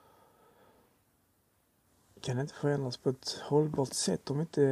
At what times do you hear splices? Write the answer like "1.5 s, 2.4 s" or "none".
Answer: none